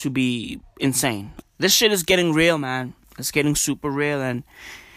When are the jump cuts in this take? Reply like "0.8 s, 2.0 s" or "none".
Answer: 1.4 s, 3.0 s